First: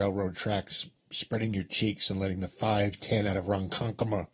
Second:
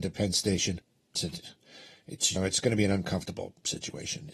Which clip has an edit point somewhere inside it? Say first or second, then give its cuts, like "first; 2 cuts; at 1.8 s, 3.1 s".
second; 2 cuts; at 1.2 s, 2.4 s